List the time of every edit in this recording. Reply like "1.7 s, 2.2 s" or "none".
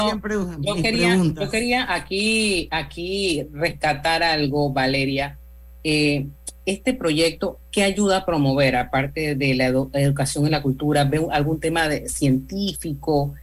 none